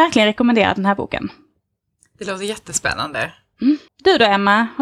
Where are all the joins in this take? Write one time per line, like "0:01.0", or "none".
0:03.9